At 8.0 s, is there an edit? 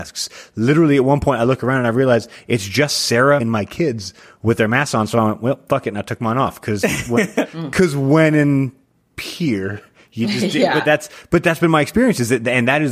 no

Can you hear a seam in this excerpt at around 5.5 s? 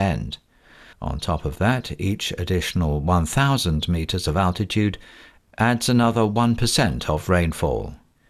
no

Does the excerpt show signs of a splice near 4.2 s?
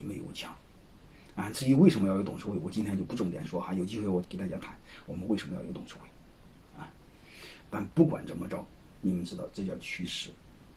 yes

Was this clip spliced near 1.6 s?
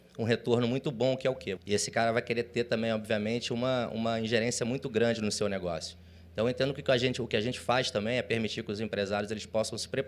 yes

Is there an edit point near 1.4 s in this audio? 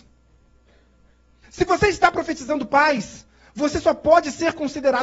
yes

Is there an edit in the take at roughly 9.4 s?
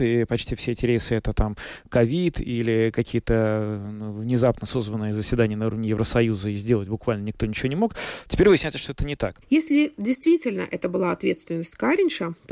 yes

